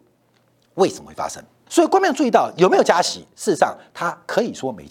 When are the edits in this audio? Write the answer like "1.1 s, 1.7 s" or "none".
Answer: 1.7 s